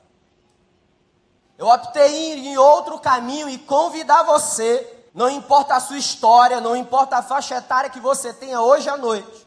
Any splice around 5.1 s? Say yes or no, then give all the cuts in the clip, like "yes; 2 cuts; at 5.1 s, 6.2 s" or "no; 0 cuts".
yes; 2 cuts; at 1.4 s, 5.1 s